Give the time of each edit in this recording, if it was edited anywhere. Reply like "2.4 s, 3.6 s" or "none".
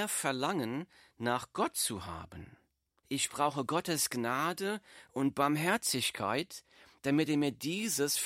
3.0 s